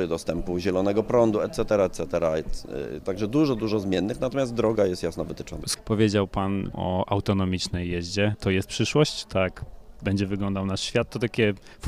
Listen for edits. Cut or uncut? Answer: uncut